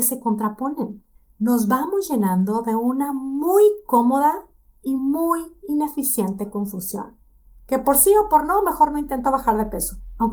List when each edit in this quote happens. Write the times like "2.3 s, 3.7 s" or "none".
none

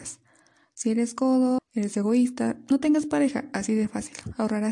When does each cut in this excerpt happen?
1.6 s

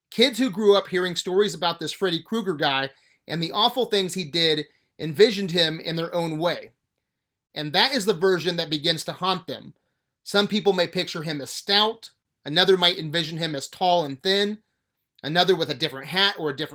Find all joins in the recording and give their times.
none

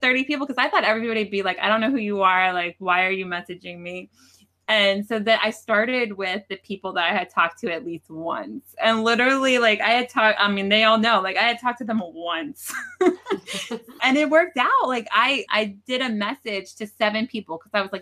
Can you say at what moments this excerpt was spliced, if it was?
14.0 s, 15.5 s

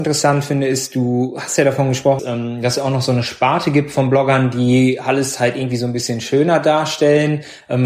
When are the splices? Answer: 2.2 s

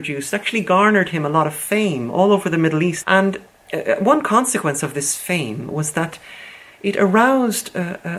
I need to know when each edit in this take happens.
3.0 s

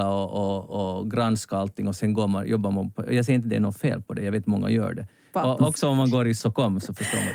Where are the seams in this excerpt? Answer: 5.3 s, 6.4 s

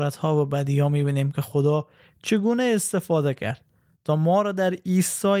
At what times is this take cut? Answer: none

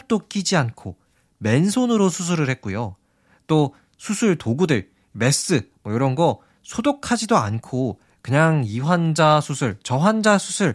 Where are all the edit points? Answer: none

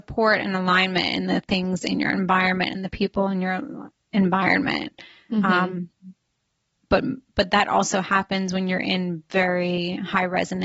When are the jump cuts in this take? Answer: none

